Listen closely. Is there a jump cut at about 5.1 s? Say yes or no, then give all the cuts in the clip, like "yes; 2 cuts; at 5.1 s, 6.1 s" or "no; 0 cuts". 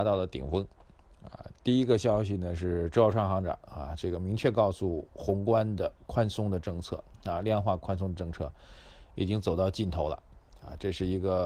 yes; 1 cut; at 5.1 s